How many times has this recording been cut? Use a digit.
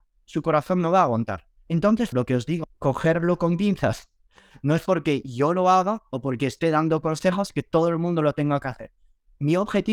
1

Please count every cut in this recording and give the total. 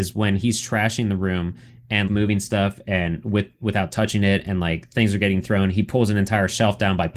1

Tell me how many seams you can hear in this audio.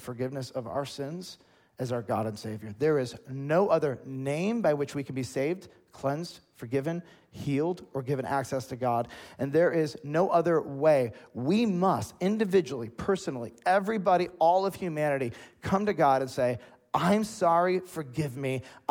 0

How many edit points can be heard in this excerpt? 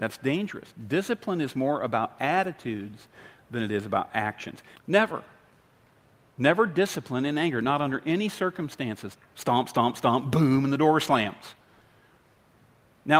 2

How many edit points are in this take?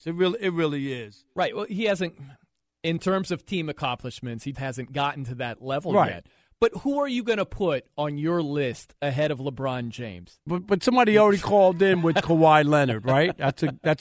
2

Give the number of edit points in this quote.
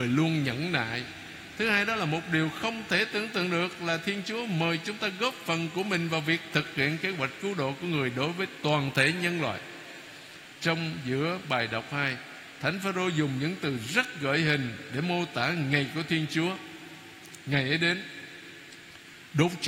0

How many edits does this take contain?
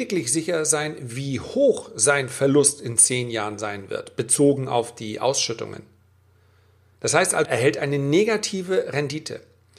1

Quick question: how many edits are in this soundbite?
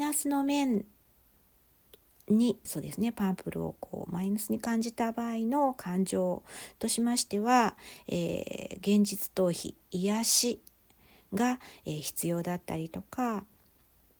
1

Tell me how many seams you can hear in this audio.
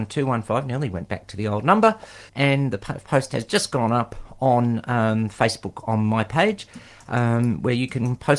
1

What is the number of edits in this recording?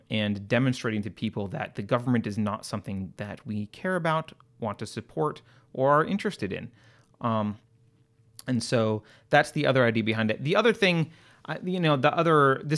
0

